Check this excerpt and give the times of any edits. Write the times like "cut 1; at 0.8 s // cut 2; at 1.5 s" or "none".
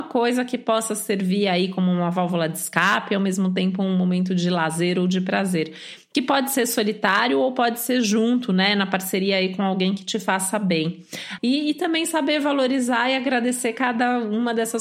cut 1; at 11.4 s